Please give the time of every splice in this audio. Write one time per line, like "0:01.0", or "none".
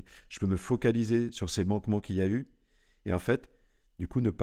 none